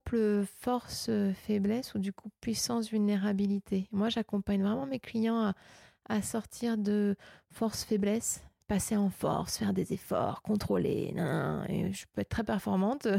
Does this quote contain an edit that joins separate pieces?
no; 0 cuts

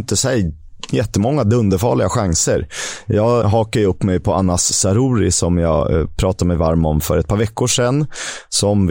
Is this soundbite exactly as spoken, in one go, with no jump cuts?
no; 1 cut; at 3.4 s

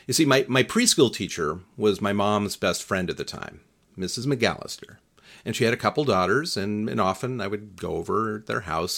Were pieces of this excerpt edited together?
no; 0 cuts

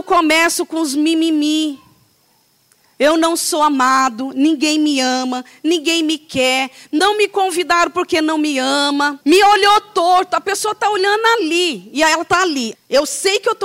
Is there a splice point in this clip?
yes; 2 cuts; at 9.2 s, 12.7 s

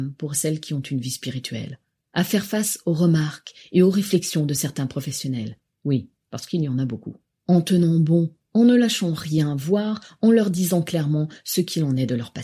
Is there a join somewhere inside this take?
no; 0 cuts

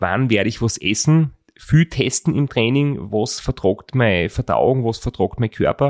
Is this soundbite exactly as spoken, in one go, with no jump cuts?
yes; 0 cuts

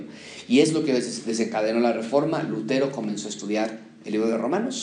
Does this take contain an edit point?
no; 0 cuts

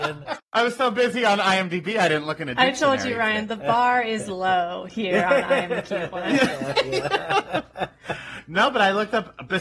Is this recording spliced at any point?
no; 0 cuts

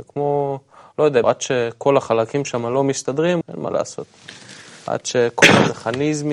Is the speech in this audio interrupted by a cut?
yes; 2 cuts; at 1.2 s, 3.4 s

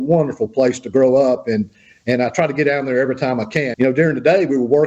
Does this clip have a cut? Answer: yes; 1 cut; at 3.7 s

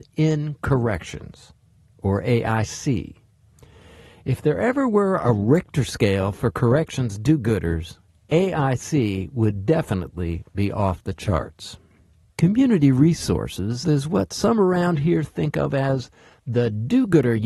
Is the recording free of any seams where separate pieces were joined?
no; 2 cuts; at 12.3 s, 13.8 s

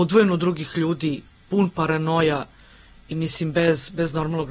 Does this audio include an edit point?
yes; 1 cut; at 3.1 s

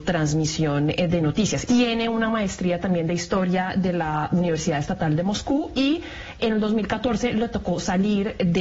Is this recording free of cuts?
no; 2 cuts; at 1.7 s, 6.4 s

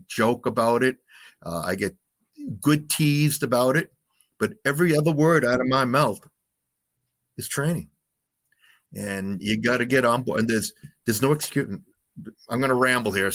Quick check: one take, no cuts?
yes; 0 cuts

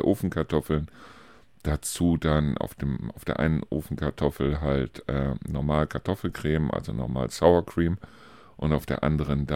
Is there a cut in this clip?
no; 0 cuts

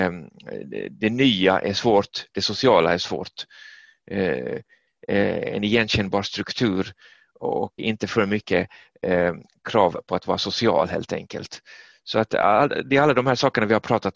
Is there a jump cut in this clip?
yes; 2 cuts; at 4.9 s, 7.8 s

